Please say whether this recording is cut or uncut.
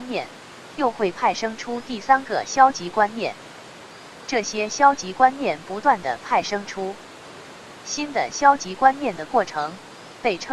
uncut